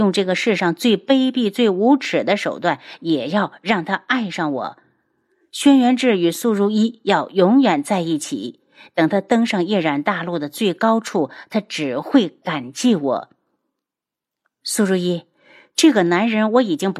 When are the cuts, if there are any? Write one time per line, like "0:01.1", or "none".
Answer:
none